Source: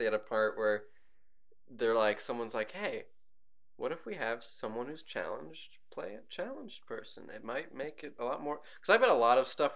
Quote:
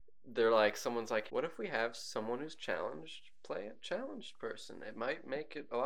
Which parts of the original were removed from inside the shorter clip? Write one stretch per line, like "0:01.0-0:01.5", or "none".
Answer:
0:02.7-0:03.8

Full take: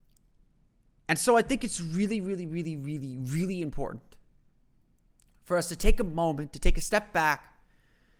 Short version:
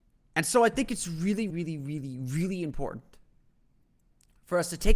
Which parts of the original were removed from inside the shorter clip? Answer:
0:02.2-0:02.5

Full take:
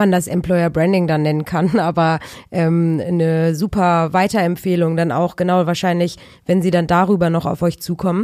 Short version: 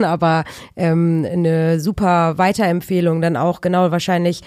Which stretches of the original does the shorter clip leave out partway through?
none

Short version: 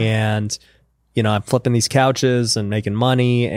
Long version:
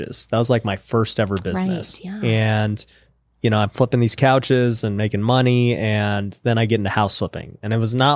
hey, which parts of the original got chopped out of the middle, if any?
none

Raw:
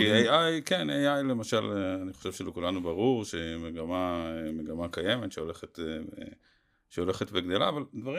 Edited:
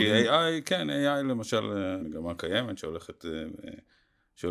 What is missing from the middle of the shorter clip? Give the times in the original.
0:02.0-0:04.5

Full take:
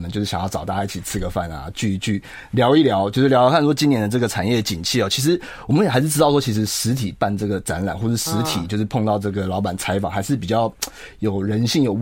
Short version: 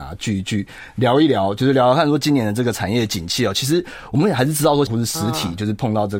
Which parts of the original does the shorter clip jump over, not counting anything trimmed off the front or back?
0:06.4-0:08.0

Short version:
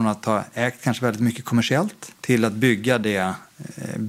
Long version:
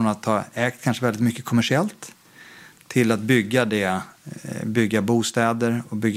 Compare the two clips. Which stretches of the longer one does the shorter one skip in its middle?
0:02.2-0:02.8

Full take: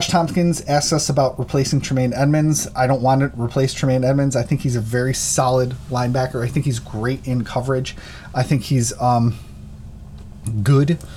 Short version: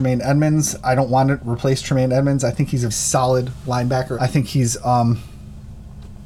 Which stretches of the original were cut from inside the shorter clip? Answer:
0:04.8-0:05.1
0:06.4-0:08.3

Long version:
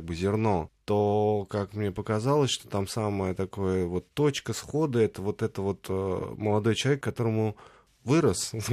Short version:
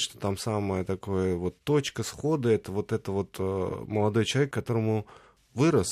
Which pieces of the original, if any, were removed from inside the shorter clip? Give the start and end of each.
none

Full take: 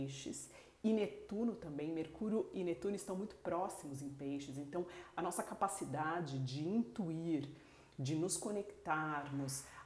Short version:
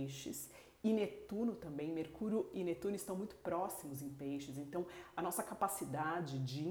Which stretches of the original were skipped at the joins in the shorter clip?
none

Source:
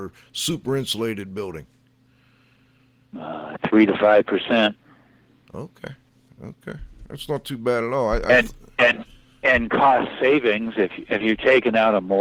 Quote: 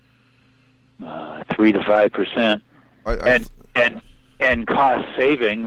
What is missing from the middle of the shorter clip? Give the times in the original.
0:05.2-0:08.1

